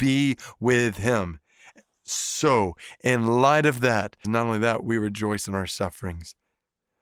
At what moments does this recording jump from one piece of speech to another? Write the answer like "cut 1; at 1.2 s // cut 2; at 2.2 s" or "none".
cut 1; at 4.2 s